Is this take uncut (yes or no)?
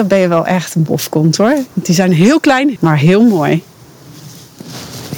no